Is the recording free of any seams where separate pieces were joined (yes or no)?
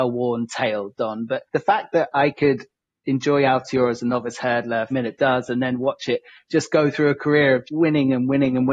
no